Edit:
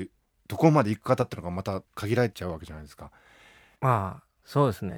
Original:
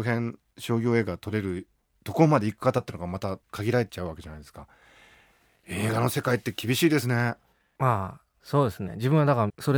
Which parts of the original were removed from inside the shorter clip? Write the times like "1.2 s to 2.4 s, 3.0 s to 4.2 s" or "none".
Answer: 5.3 s to 7.7 s